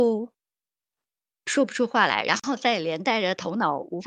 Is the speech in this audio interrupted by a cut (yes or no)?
no